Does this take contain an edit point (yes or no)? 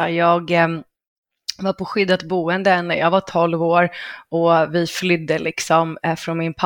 no